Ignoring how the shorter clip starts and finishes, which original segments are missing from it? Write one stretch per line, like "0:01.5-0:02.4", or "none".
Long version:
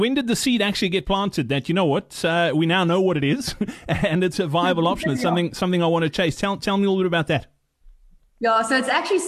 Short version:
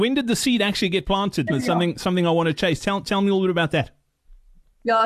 0:01.5-0:05.0